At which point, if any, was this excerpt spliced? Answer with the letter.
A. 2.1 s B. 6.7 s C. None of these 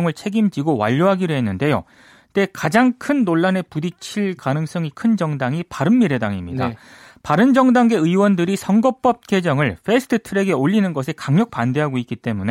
C